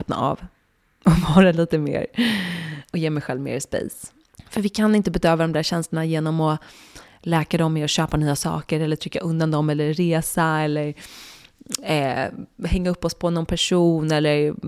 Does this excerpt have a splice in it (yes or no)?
yes